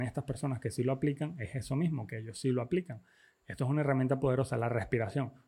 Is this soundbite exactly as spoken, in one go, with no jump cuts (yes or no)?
yes